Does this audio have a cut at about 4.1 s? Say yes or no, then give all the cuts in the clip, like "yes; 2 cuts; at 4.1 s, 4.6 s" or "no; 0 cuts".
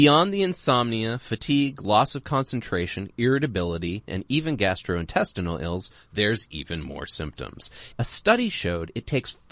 yes; 2 cuts; at 4.1 s, 7.9 s